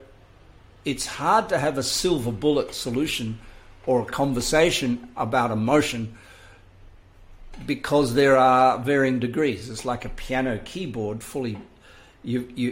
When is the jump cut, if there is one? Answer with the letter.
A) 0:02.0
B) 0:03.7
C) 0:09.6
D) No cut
D